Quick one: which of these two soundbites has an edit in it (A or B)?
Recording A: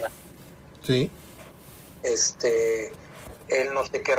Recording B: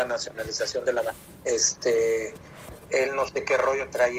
B